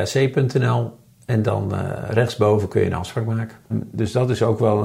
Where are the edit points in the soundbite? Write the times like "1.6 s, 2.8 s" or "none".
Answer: 3.7 s